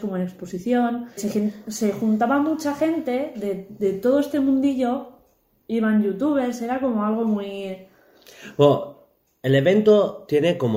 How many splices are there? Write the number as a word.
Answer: one